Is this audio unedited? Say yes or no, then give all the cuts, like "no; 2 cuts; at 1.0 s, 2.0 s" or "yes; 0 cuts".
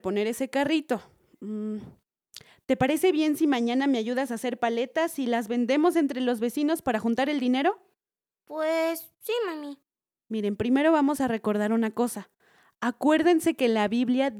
yes; 0 cuts